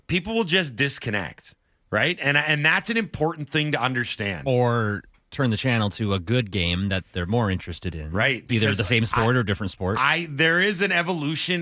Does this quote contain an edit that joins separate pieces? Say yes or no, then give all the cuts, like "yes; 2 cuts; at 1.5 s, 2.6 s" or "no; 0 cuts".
no; 0 cuts